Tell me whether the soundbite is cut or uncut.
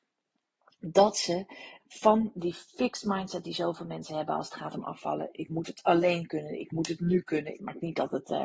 cut